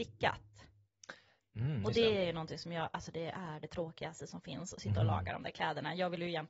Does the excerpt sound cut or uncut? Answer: uncut